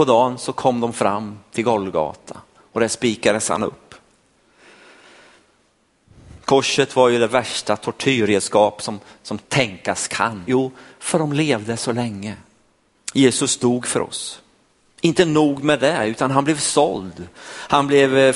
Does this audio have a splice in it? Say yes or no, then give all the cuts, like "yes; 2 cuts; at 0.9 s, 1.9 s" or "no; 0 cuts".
yes; 2 cuts; at 10.4 s, 12.9 s